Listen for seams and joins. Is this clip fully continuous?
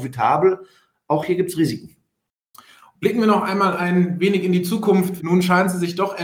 no; 1 cut; at 5.2 s

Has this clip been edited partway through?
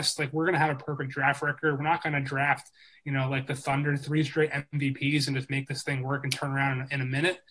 no; 0 cuts

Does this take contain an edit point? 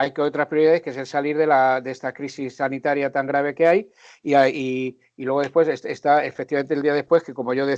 no; 0 cuts

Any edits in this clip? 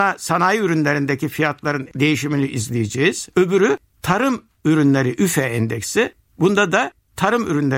no; 0 cuts

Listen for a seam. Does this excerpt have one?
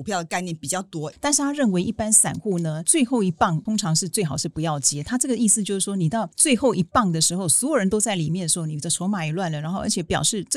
yes; 1 cut; at 1.1 s

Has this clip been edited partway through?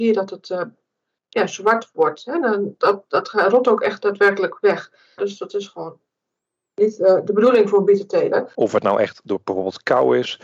yes; 2 cuts; at 5.2 s, 8.5 s

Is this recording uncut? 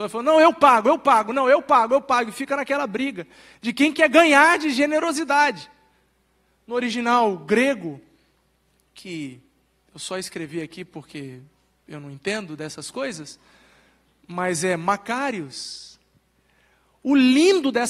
no; 1 cut; at 6.5 s

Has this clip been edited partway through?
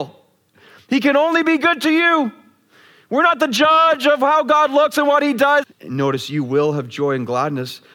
yes; 1 cut; at 5.6 s

